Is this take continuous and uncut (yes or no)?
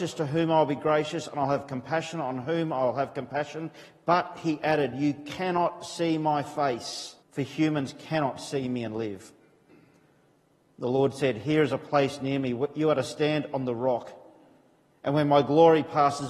no